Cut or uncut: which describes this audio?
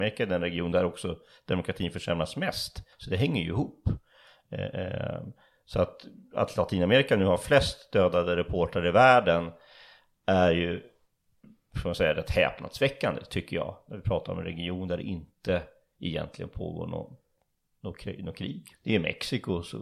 cut